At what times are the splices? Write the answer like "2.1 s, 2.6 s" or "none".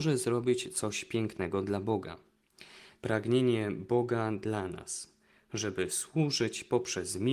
3.0 s